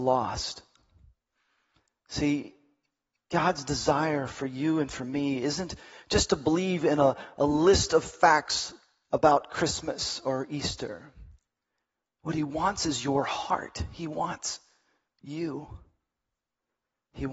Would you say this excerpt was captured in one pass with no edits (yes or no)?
yes